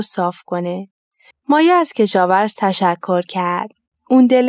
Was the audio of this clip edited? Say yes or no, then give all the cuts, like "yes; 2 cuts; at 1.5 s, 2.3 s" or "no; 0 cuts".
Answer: yes; 1 cut; at 1.3 s